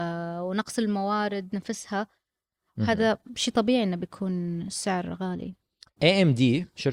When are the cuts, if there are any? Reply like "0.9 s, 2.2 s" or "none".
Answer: 6.0 s